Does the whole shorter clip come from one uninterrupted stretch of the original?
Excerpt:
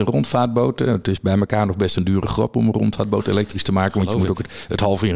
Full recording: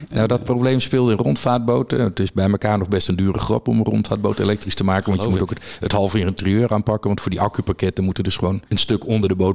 yes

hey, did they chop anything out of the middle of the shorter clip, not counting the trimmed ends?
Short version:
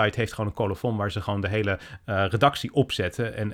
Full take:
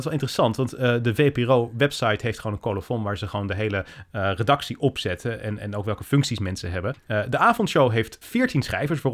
no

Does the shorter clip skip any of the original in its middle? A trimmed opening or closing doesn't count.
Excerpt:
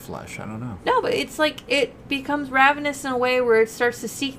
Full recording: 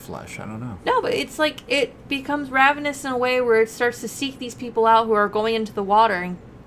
no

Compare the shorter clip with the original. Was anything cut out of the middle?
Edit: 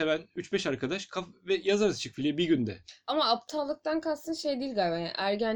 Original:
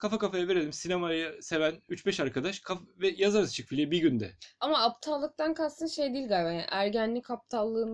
no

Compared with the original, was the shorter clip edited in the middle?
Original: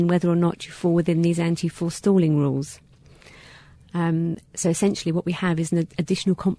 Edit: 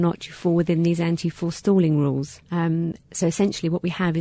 yes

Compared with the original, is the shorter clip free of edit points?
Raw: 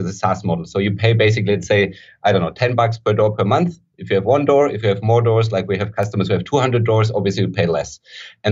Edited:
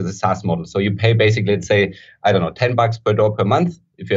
yes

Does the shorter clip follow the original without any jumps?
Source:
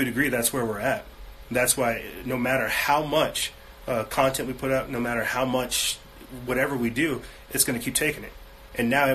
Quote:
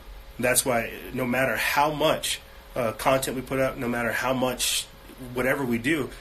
yes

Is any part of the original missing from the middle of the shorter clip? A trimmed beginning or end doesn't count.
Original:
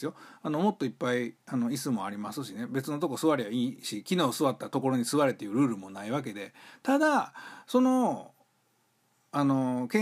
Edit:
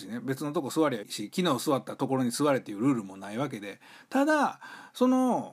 yes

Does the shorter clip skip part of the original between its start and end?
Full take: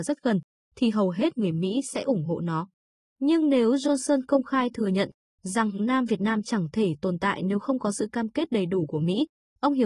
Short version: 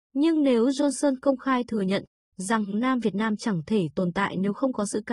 no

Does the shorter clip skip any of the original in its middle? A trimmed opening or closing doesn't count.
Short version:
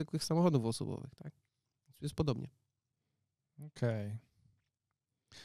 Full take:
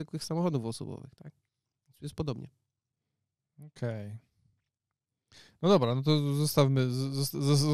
no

